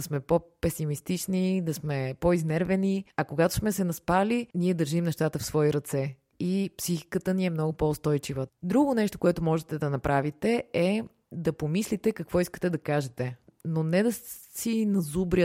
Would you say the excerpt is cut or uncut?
cut